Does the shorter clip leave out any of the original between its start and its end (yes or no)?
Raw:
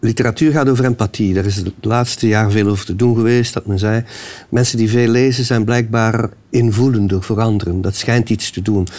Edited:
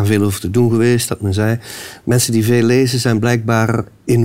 no